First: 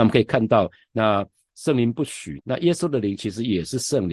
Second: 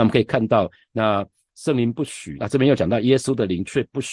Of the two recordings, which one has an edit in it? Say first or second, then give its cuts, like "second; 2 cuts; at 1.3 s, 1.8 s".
first; 1 cut; at 2.4 s